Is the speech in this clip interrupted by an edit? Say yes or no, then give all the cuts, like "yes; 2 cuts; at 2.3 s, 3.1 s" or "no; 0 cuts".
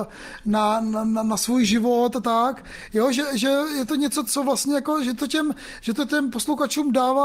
yes; 1 cut; at 4.2 s